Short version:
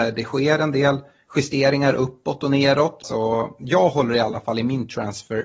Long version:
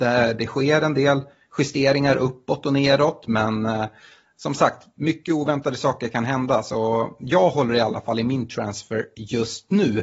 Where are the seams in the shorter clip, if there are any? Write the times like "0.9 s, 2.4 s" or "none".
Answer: 3.0 s